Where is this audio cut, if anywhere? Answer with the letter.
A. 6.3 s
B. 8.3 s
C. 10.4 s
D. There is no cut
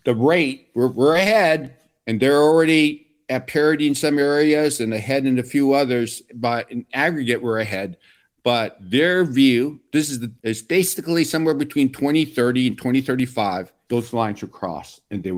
C